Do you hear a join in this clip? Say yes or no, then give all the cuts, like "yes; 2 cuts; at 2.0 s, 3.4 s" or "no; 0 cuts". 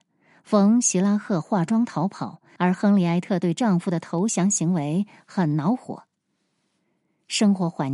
yes; 1 cut; at 2.6 s